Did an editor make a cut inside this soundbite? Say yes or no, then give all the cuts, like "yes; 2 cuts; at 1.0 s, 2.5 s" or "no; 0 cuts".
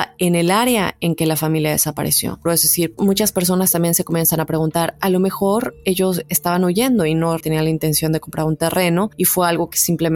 yes; 2 cuts; at 2.5 s, 7.4 s